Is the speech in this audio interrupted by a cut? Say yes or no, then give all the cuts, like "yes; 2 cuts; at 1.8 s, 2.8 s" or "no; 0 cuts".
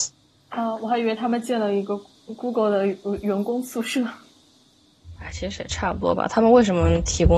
yes; 1 cut; at 5.1 s